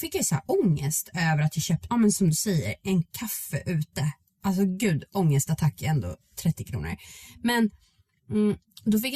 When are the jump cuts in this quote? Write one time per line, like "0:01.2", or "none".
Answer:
0:01.9